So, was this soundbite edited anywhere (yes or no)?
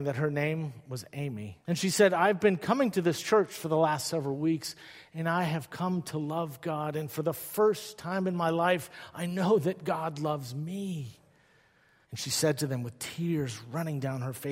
yes